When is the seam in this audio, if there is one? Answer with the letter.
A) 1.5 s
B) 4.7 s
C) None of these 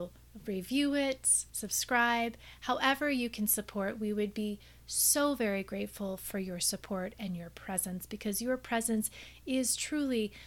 A